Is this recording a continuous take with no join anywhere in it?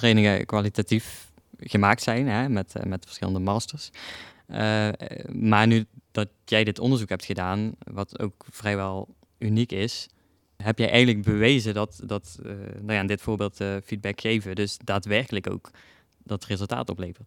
no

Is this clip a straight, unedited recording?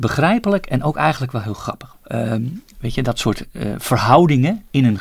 no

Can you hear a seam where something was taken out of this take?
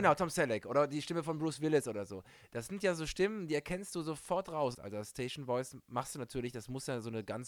yes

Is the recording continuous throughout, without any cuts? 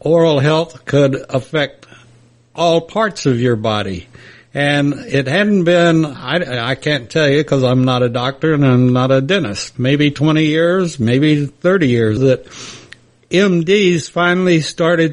no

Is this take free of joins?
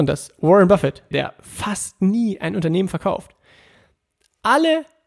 no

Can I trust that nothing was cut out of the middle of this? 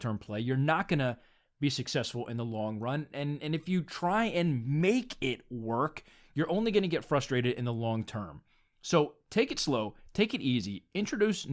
yes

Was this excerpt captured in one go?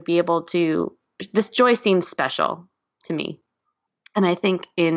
yes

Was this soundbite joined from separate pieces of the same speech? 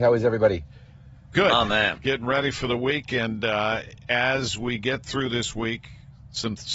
no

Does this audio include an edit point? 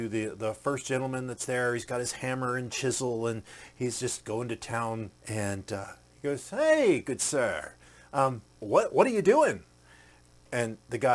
yes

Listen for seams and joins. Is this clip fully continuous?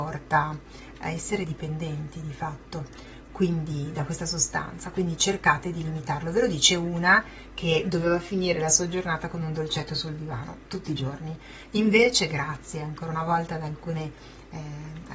yes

